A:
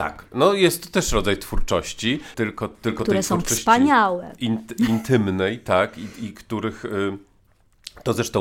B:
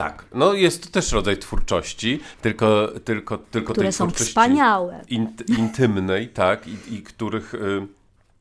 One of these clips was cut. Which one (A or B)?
A